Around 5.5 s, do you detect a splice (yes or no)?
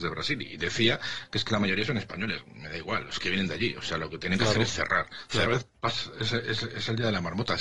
yes